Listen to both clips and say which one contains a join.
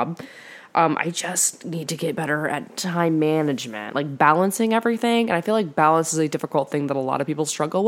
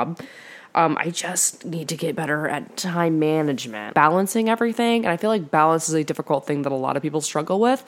second; 1 cut; at 3.9 s

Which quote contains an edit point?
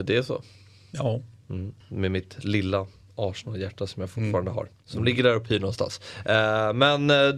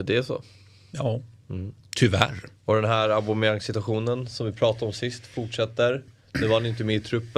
first; 1 cut; at 1.8 s

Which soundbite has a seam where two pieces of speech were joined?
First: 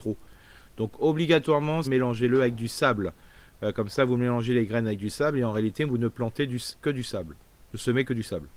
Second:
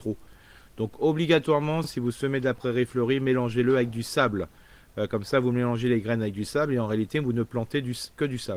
first; 1 cut; at 1.8 s

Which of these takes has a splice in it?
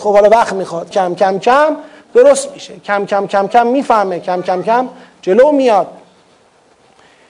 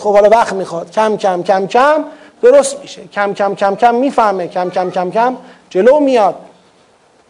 first; 2 cuts; at 0.9 s, 4.6 s

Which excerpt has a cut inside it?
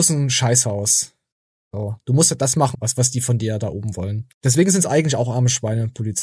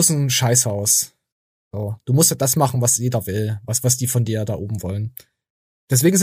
first; 2 cuts; at 2.7 s, 4.3 s

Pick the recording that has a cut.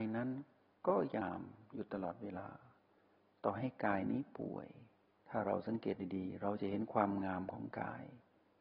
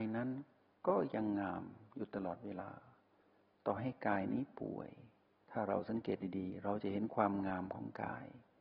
first; 1 cut; at 1.2 s

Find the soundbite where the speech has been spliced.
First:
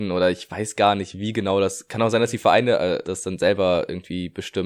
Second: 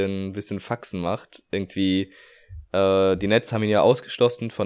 first; 1 cut; at 3.0 s

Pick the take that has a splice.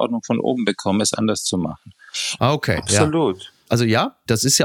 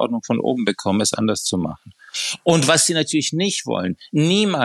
first; 1 cut; at 2.4 s

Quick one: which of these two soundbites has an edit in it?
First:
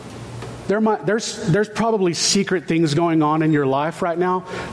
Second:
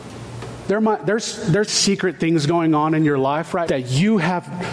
second; 2 cuts; at 1.7 s, 3.7 s

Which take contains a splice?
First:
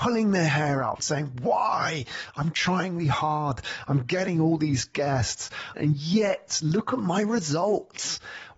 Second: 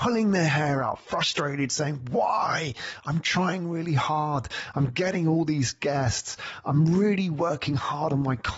first; 3 cuts; at 1.0 s, 3.0 s, 5.7 s

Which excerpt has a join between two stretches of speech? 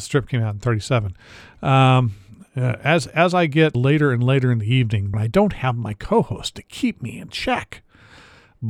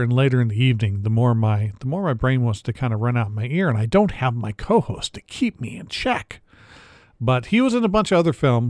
first; 2 cuts; at 3.7 s, 5.1 s

